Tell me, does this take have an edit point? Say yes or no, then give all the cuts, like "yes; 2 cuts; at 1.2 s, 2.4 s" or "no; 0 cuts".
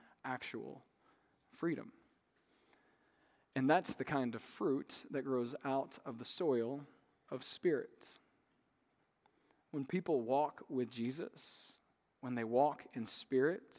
no; 0 cuts